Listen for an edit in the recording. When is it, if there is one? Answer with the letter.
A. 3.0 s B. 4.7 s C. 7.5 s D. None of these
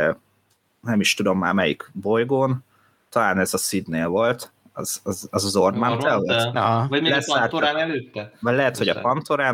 D